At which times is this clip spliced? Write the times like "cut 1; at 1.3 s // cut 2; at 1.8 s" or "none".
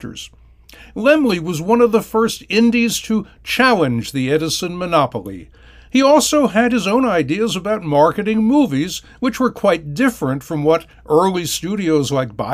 none